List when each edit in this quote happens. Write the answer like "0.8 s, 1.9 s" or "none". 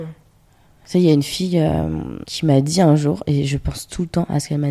none

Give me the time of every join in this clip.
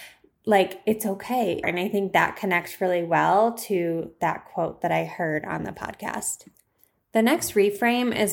1.6 s

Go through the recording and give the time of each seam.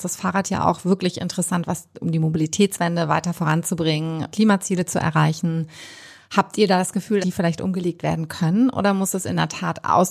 4.3 s, 7.2 s

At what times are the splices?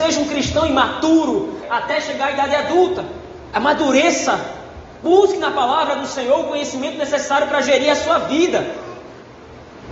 1.6 s

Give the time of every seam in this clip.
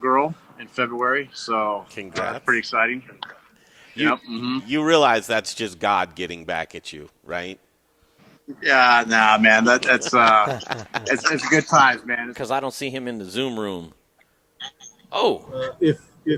12.3 s, 15.1 s

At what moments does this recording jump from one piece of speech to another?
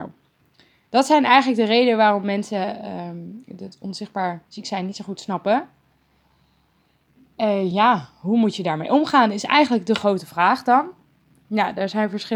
none

